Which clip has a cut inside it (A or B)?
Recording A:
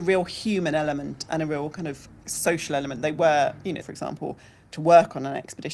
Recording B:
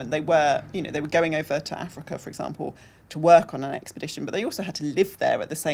A